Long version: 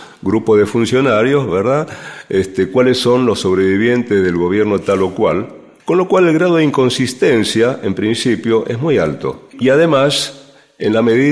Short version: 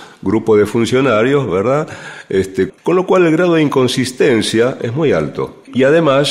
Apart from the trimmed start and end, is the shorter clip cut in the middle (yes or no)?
yes